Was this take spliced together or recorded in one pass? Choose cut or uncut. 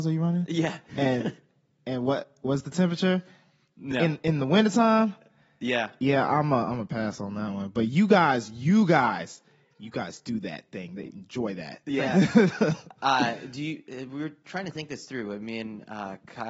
uncut